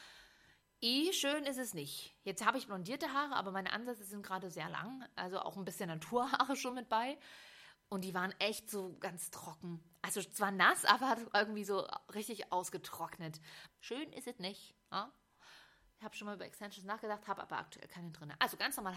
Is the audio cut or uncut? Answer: cut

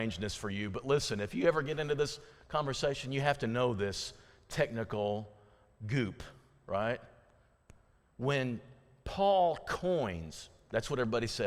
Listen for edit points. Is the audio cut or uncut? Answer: uncut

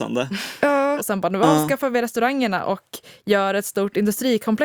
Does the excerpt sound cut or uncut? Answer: cut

